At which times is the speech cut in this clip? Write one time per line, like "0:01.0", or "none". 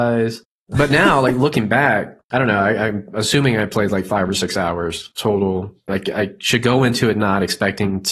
0:02.2
0:05.9